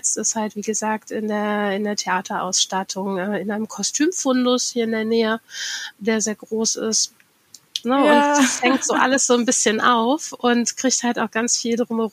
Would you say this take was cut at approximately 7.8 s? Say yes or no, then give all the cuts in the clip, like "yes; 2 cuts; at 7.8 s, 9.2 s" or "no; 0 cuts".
yes; 1 cut; at 7.8 s